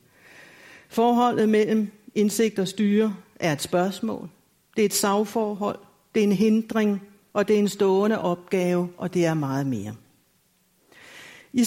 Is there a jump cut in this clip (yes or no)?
yes